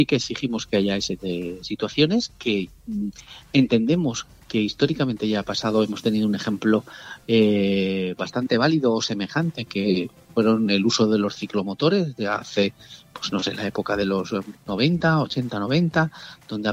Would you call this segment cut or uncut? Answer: cut